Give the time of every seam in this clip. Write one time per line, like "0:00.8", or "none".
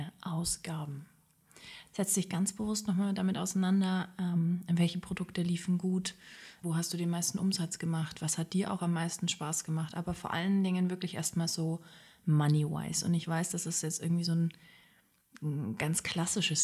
0:01.9
0:06.6